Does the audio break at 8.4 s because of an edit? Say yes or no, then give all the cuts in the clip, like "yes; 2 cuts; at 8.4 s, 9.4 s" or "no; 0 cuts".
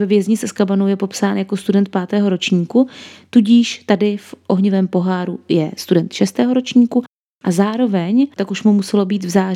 yes; 1 cut; at 8.4 s